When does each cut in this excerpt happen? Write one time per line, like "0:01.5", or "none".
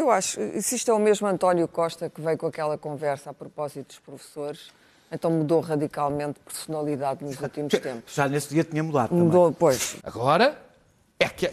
0:10.0